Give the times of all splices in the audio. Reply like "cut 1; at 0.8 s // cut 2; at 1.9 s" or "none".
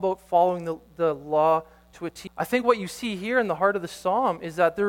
cut 1; at 2.3 s